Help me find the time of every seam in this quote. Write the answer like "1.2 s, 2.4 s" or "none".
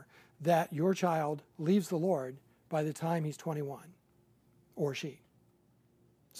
none